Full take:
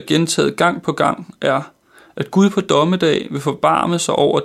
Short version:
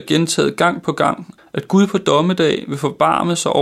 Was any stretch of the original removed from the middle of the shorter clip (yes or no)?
yes